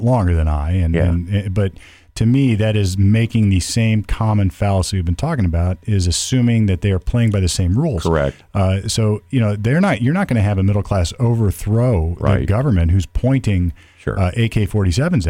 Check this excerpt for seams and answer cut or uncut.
uncut